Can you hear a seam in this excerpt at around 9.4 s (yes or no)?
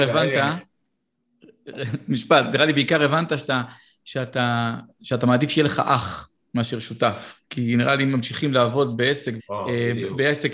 yes